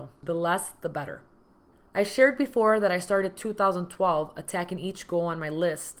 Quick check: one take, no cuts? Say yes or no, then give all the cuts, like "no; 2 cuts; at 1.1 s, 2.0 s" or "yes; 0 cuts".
yes; 0 cuts